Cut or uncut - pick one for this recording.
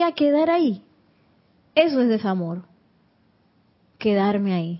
uncut